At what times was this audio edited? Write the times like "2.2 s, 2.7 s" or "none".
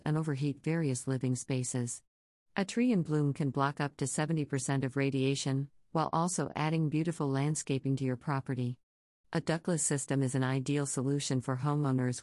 9.2 s